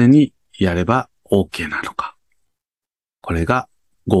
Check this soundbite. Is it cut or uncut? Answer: uncut